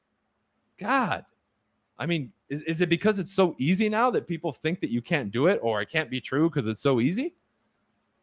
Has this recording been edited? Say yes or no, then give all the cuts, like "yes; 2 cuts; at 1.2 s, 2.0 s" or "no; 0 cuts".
no; 0 cuts